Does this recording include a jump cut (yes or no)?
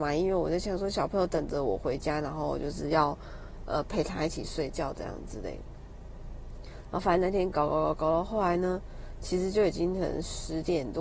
no